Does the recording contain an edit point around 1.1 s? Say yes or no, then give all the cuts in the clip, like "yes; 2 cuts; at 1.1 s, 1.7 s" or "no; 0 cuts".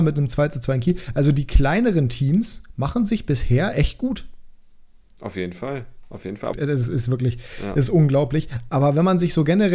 no; 2 cuts; at 6.5 s, 8.7 s